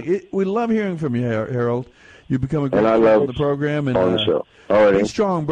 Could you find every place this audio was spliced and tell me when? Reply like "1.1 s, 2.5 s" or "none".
none